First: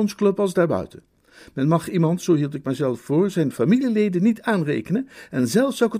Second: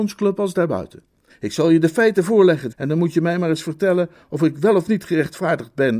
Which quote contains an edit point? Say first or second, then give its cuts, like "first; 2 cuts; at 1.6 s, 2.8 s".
second; 2 cuts; at 1.3 s, 2.7 s